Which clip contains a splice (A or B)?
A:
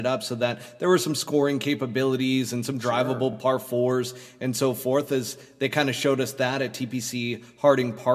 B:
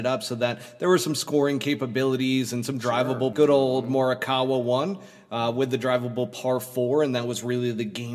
B